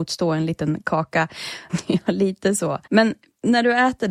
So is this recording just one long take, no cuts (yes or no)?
no